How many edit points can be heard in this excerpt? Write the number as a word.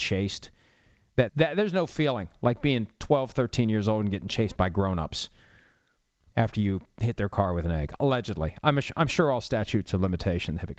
one